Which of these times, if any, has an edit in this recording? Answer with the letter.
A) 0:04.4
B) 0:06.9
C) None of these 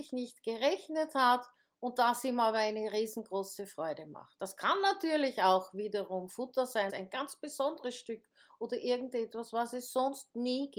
B